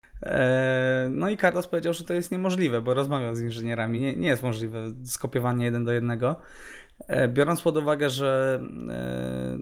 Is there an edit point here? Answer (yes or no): no